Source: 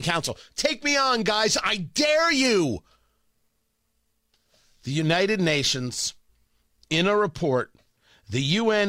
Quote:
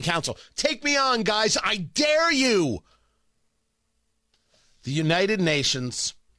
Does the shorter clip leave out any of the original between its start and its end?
no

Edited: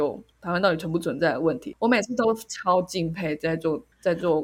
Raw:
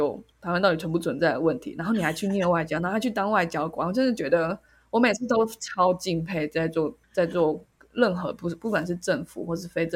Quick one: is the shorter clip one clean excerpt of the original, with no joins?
no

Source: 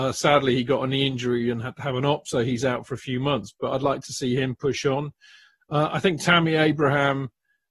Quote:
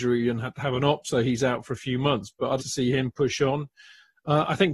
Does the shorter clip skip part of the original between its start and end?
yes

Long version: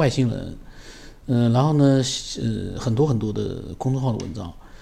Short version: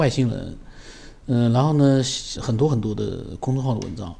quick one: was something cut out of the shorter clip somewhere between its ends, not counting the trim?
yes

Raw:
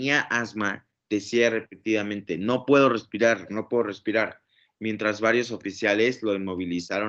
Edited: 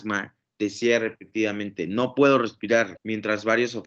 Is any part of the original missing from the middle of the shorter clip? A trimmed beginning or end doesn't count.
yes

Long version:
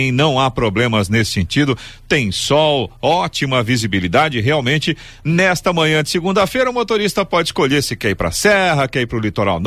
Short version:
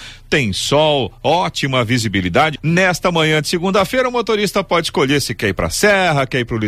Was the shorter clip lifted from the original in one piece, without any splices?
no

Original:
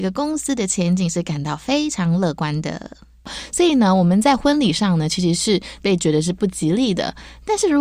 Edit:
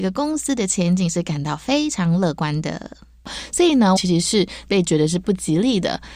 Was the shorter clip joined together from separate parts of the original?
yes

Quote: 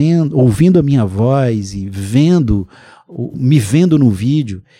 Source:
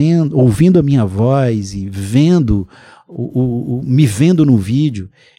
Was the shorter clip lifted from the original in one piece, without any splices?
no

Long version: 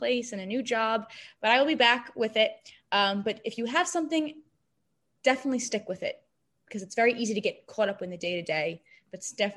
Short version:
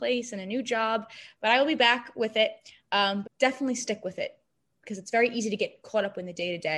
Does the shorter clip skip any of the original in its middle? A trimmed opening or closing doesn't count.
yes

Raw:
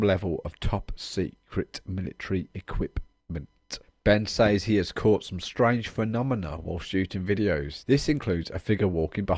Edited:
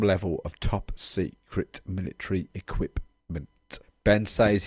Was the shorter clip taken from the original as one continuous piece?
yes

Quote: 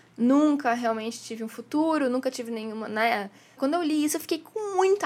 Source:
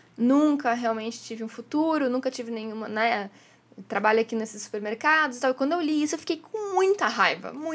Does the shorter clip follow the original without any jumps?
no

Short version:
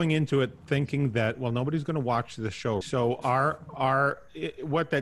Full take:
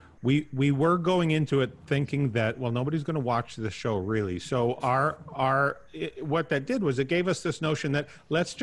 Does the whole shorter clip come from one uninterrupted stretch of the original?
no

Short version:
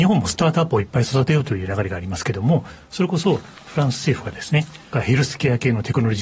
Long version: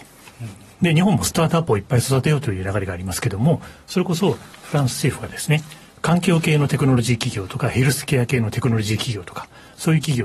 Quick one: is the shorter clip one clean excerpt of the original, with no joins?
no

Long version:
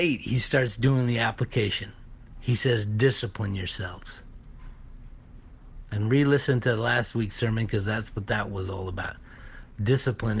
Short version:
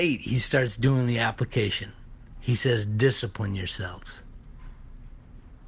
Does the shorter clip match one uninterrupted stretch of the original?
yes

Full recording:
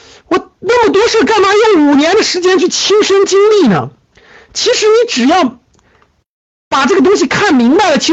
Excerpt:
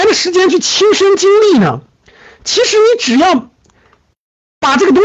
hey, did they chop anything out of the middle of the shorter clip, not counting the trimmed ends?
no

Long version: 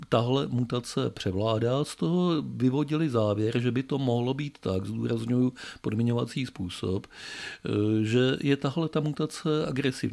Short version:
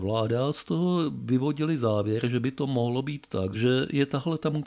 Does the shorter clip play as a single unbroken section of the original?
no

